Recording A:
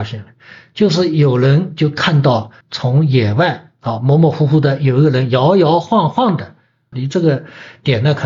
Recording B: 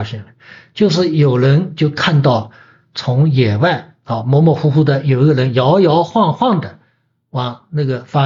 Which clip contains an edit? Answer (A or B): A